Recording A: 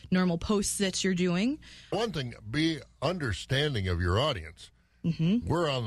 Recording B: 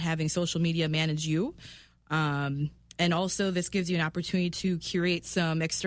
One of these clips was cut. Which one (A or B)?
A